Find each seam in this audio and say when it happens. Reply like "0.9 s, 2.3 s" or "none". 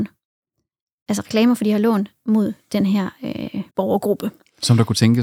3.7 s